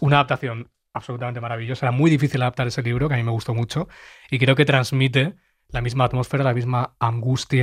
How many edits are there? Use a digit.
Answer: 0